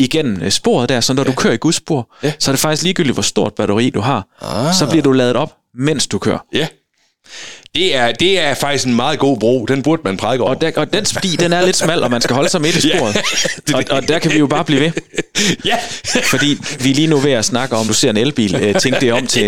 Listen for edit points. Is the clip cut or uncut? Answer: cut